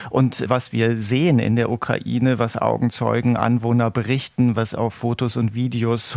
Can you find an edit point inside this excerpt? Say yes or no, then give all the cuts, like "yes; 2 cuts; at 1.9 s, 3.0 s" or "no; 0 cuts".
no; 0 cuts